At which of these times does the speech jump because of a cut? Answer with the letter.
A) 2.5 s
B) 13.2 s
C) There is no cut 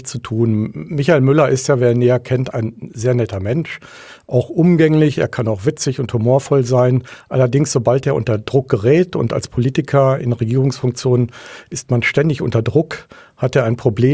A